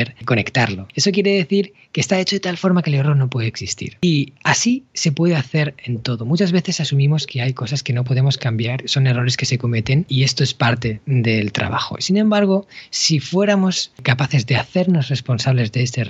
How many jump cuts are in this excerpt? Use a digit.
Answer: 0